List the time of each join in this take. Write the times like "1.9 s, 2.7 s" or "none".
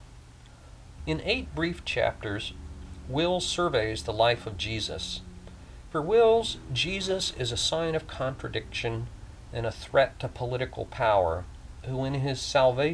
1.0 s, 5.9 s